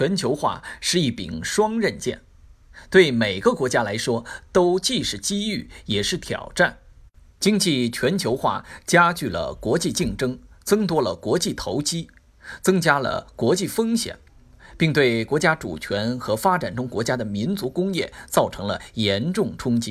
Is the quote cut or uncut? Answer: uncut